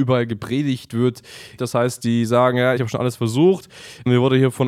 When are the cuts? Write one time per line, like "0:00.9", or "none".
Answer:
0:01.6
0:02.8

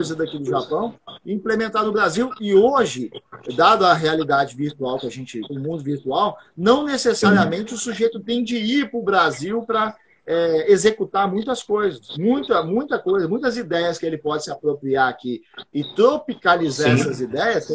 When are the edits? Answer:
0:05.5

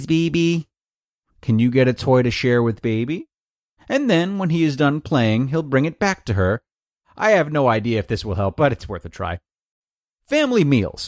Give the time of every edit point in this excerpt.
0:01.2
0:07.0

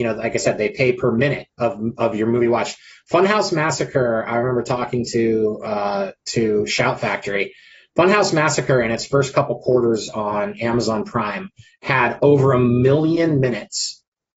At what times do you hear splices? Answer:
none

